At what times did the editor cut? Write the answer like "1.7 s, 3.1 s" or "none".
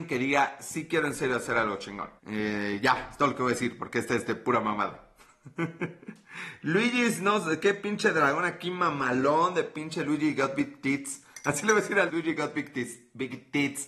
2.2 s, 12.1 s